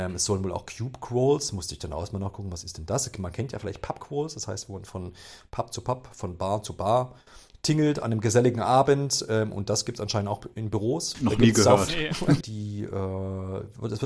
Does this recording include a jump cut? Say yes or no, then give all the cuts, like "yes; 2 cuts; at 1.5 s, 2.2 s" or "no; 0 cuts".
yes; 2 cuts; at 11.1 s, 12.4 s